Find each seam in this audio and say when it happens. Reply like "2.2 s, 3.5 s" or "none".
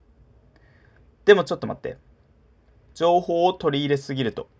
none